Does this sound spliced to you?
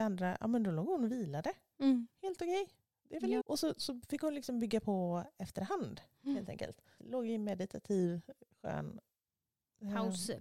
yes; 2 cuts; at 3.4 s, 7.0 s

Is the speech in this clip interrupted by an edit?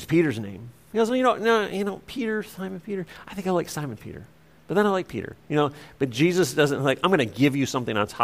no; 0 cuts

